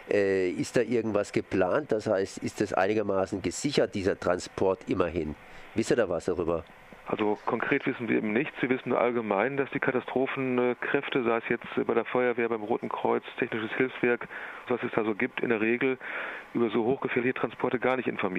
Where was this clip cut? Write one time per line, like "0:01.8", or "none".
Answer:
0:14.7

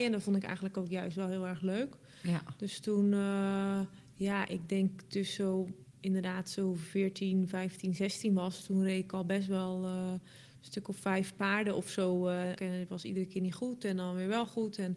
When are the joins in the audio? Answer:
0:12.6

